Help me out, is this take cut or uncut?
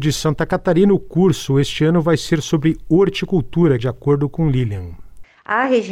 cut